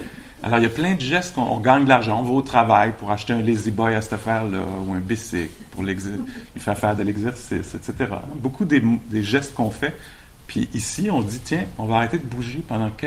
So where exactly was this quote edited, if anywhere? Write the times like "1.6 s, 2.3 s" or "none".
none